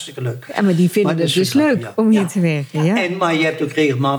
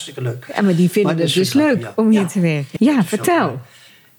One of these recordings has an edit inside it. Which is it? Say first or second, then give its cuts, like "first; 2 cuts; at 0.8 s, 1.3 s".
second; 1 cut; at 2.8 s